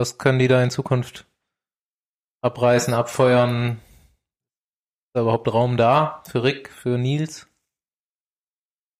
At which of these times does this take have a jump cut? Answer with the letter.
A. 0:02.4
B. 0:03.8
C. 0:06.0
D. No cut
D